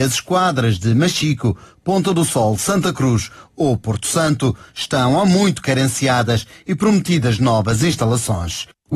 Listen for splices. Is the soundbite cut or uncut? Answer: uncut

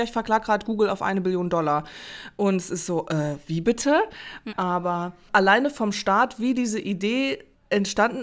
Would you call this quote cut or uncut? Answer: cut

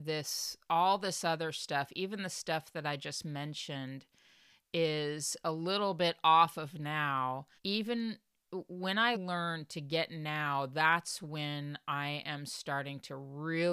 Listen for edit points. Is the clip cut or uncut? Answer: cut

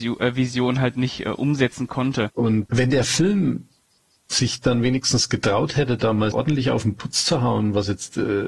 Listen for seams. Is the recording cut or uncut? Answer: cut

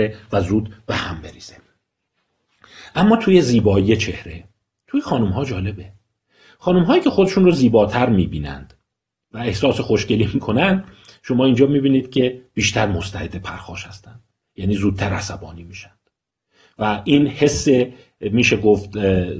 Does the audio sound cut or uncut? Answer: uncut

